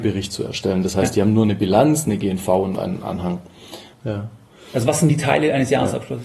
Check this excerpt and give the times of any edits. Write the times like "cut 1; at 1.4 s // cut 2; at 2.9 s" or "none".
cut 1; at 3.9 s